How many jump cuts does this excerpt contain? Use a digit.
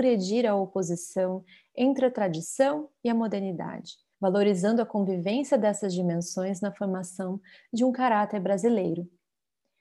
1